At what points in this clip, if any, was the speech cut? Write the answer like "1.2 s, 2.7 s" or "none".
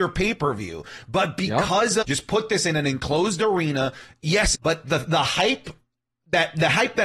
2.0 s, 4.5 s